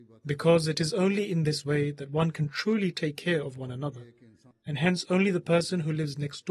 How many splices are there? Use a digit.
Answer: 1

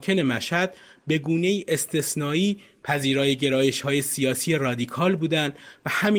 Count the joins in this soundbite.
0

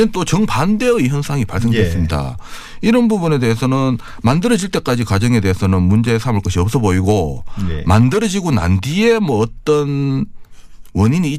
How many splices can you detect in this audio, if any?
0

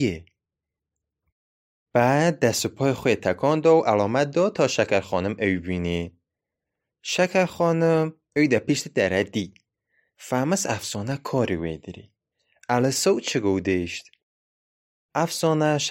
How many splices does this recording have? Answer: 0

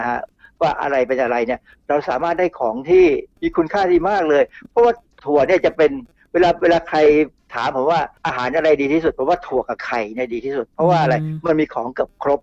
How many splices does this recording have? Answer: 2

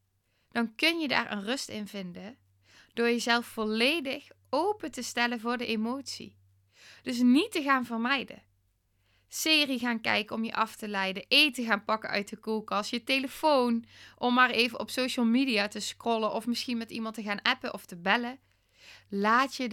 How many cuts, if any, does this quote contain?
0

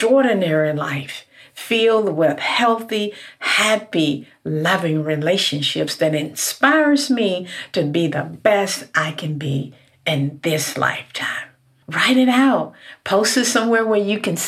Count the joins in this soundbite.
1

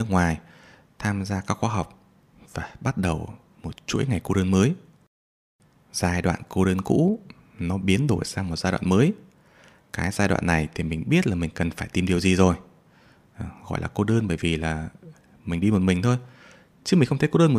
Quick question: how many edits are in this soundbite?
0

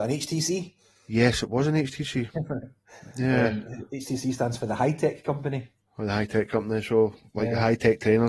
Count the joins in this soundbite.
0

